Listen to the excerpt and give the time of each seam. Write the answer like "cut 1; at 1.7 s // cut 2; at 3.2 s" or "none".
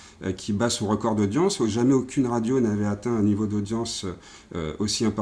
none